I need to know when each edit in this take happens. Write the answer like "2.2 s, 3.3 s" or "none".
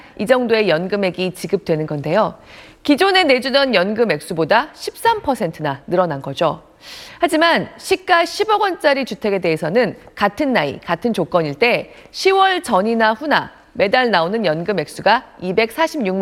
none